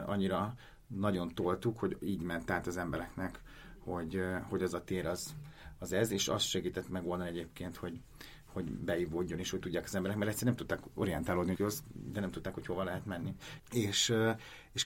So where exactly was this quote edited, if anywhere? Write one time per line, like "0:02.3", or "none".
0:11.5
0:13.6